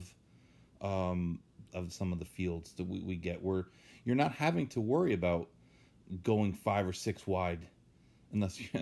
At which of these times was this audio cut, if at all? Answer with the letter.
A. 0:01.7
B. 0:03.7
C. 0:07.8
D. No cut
A